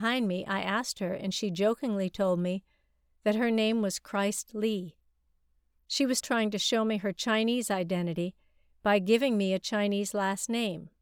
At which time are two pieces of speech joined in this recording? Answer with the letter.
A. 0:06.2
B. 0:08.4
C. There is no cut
A